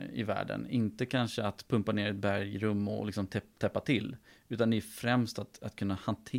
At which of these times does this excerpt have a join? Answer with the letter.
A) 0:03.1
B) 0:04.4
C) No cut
C